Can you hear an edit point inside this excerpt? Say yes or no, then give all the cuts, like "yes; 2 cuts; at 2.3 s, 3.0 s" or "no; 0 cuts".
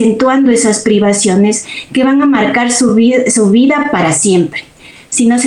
no; 0 cuts